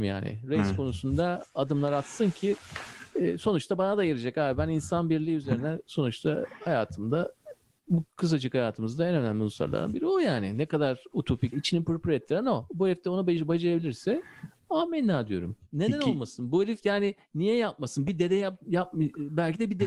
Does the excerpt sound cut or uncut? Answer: cut